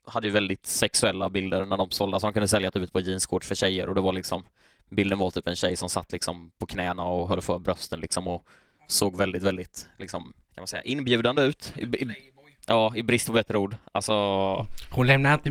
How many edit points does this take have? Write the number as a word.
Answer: one